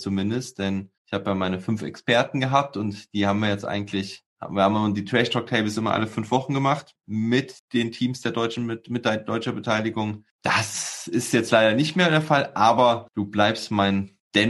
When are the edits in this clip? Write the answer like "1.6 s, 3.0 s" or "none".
none